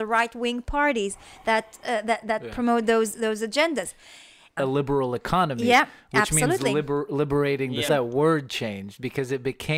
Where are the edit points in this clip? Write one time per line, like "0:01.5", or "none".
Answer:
0:04.6
0:07.9